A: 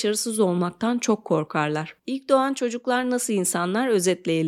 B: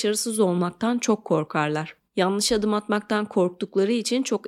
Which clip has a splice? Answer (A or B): A